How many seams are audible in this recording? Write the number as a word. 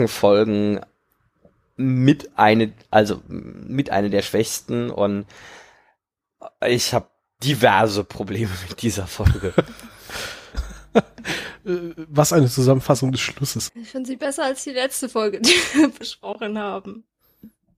two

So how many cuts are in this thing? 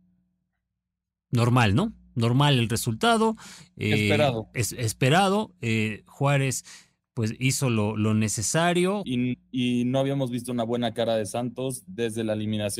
one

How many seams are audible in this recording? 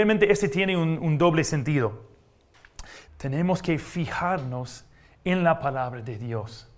one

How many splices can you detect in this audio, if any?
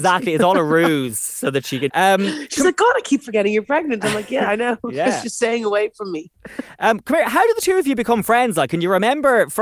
one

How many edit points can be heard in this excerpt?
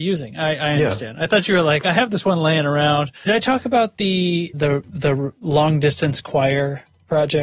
two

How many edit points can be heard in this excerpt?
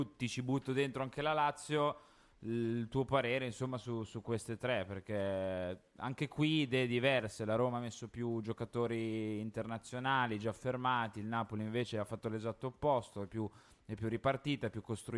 zero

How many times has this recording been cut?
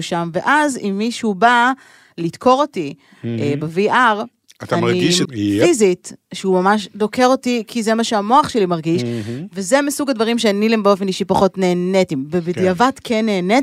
one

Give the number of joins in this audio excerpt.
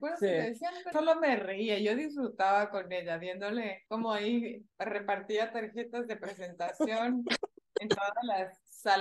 two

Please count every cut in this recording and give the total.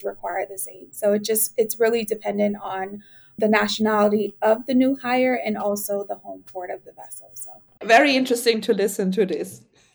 zero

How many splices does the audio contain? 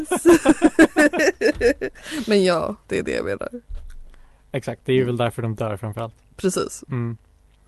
one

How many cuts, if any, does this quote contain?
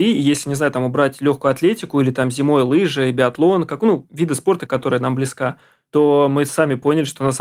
one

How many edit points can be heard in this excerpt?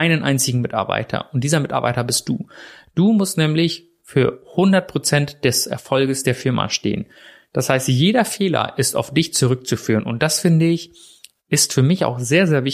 zero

